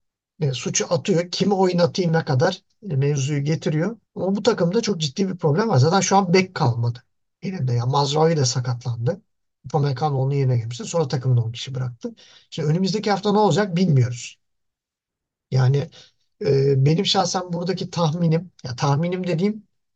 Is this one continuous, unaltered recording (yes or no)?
no